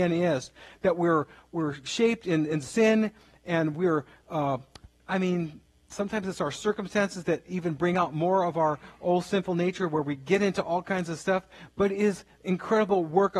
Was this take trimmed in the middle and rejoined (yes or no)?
yes